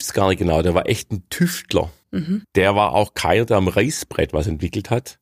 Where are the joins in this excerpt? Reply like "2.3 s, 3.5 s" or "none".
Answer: 2.4 s